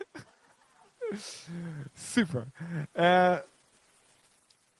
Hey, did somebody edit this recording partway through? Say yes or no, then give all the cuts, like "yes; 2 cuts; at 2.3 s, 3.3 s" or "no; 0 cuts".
no; 0 cuts